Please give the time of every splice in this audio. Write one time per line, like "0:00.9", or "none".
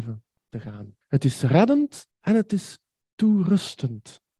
0:01.0
0:02.1